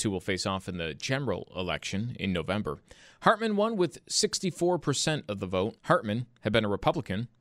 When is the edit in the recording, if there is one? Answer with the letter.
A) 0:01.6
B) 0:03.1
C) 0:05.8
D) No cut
C